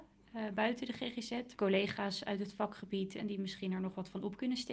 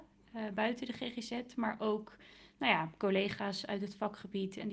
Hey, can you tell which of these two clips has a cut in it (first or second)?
first